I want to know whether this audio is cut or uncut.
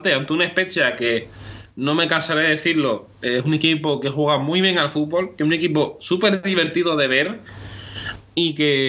uncut